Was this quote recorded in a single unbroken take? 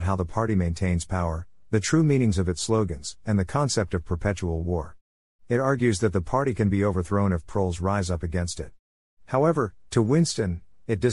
yes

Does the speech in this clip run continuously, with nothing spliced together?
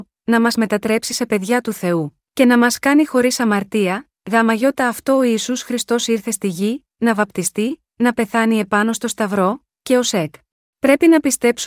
no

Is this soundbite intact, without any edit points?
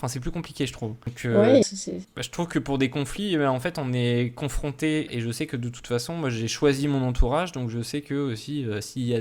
no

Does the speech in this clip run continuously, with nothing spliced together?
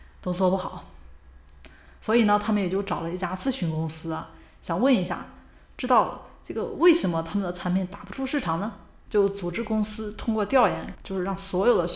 no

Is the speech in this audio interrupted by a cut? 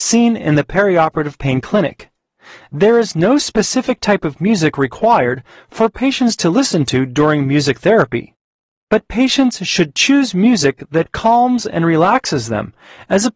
no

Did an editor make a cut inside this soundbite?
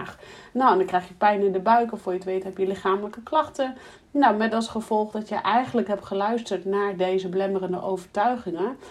no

